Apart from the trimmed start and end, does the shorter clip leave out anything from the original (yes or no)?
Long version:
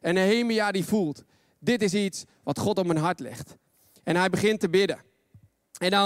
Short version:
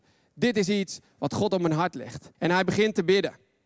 yes